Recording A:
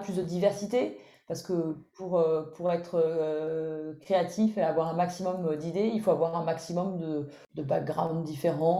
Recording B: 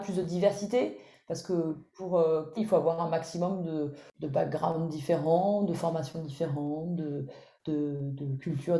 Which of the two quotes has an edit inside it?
B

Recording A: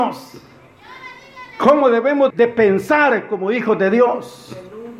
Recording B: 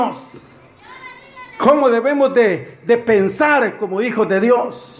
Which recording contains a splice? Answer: A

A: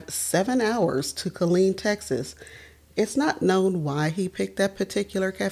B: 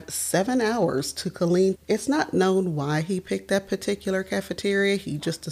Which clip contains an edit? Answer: B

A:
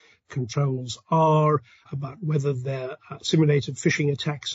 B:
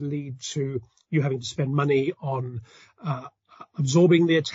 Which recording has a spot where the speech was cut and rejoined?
A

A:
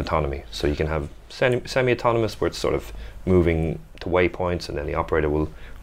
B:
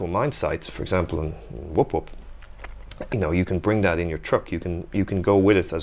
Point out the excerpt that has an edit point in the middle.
B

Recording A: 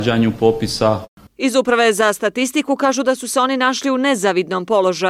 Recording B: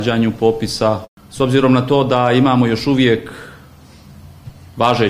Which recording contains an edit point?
A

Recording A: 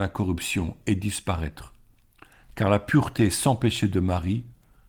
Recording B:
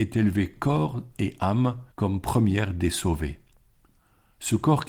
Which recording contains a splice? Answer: B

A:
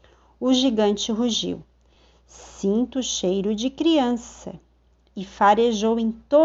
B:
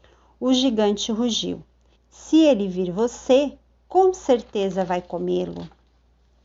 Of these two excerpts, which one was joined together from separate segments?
B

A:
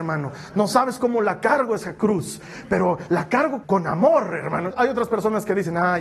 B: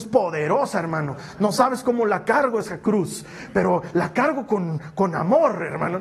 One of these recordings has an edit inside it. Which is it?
A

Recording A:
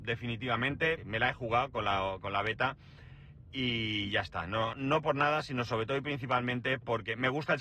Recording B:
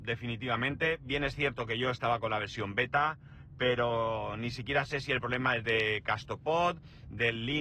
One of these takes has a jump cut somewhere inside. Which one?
A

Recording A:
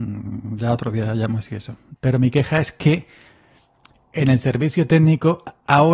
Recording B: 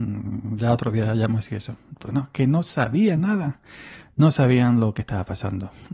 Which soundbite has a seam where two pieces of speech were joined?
A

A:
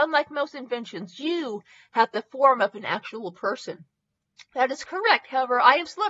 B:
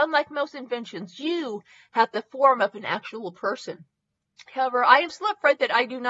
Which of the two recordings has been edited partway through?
B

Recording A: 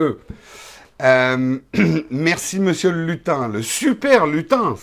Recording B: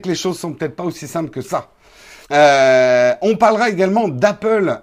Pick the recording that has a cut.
B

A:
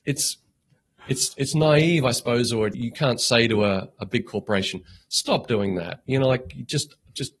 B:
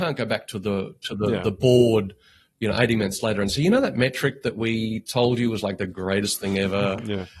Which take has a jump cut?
A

